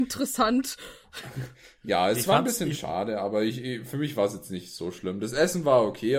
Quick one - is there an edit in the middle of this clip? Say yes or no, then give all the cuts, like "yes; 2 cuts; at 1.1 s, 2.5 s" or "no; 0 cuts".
no; 0 cuts